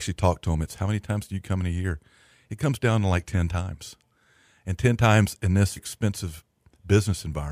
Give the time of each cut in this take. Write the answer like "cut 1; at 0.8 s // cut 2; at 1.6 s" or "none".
cut 1; at 5.8 s